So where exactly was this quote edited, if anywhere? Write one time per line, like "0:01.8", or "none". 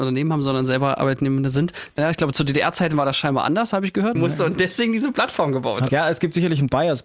0:02.0
0:04.2
0:05.9